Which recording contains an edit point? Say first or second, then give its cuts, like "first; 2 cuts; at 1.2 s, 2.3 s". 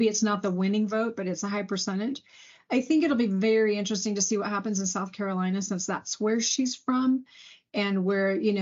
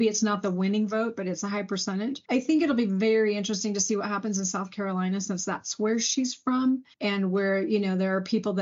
second; 2 cuts; at 2.2 s, 6.9 s